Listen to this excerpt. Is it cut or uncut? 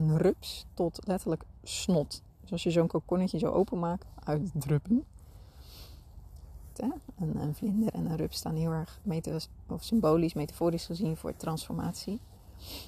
cut